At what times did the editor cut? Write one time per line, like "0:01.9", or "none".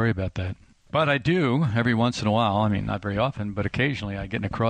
none

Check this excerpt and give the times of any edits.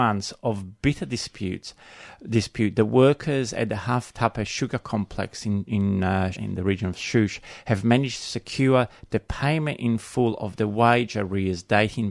0:06.3

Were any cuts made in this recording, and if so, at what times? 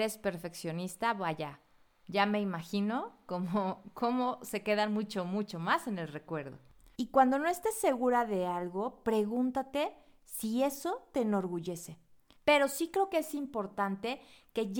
0:06.9
0:12.4

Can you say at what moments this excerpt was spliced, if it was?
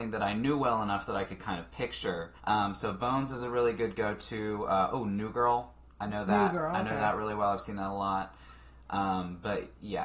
0:02.4

